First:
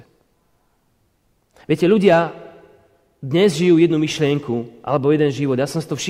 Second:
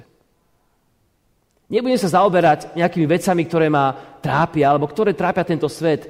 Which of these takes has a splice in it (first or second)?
first